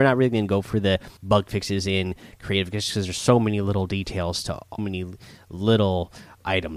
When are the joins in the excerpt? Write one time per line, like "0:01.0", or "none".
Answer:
0:01.2
0:04.8

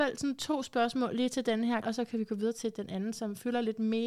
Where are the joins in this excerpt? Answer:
0:01.8

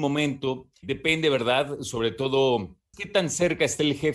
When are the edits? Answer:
0:02.9

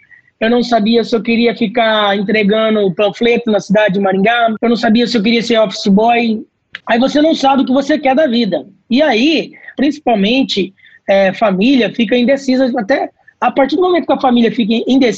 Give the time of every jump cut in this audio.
0:06.8
0:09.8

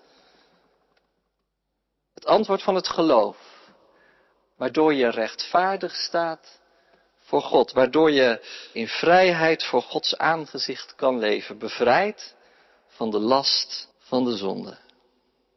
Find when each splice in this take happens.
0:08.7
0:13.9

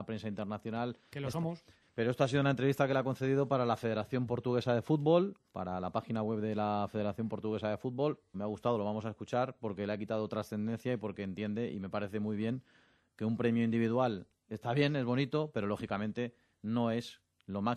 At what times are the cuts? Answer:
0:01.8
0:08.3

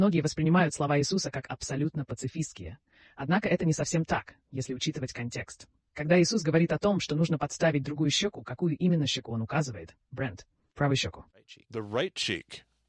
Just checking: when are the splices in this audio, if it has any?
none

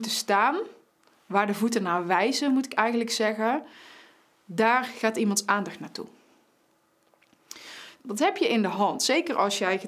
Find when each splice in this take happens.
0:08.0

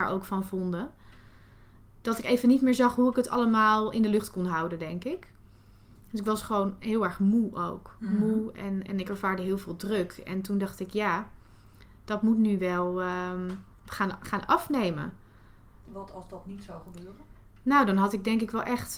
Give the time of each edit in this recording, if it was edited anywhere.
0:13.7

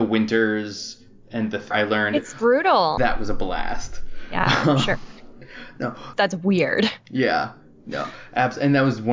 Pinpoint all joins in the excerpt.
0:01.7
0:03.0
0:06.1

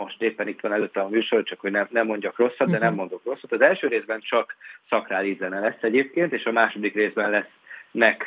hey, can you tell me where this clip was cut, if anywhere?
none

